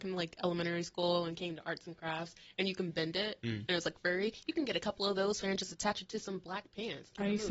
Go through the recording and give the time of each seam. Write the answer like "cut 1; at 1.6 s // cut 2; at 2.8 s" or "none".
cut 1; at 5.4 s

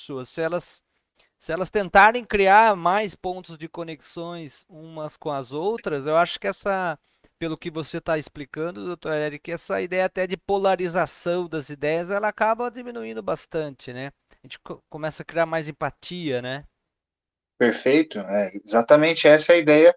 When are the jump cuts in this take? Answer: none

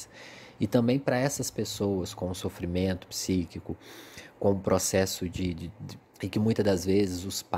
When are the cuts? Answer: cut 1; at 6.0 s

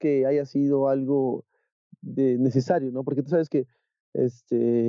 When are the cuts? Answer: none

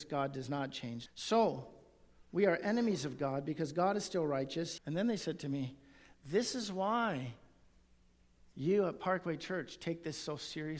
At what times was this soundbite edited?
cut 1; at 1.1 s // cut 2; at 4.8 s

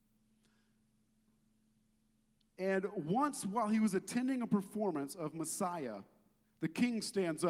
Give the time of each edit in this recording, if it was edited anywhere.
cut 1; at 6.4 s

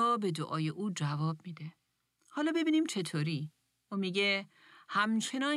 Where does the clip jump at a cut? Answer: none

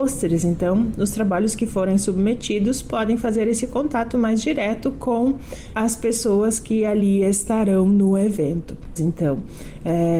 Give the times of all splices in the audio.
cut 1; at 5.8 s // cut 2; at 9.0 s

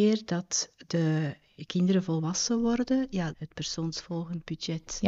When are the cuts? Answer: cut 1; at 3.3 s

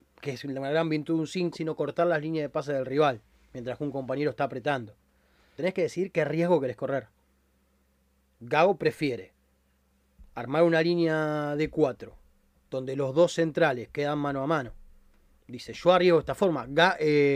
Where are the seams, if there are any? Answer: cut 1; at 1.5 s // cut 2; at 5.6 s

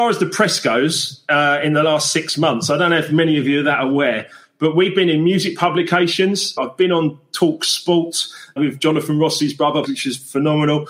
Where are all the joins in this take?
cut 1; at 6.6 s // cut 2; at 8.6 s // cut 3; at 9.9 s

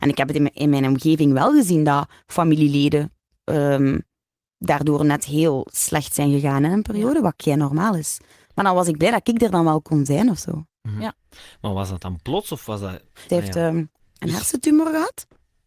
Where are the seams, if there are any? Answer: cut 1; at 13.3 s

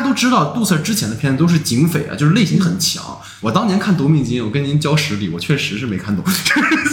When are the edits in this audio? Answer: cut 1; at 3.4 s

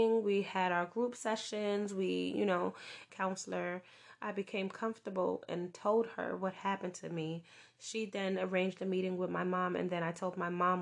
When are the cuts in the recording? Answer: cut 1; at 3.1 s

